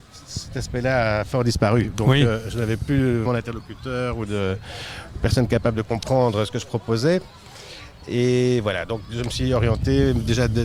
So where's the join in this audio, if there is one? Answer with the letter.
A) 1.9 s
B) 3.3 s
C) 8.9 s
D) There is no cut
B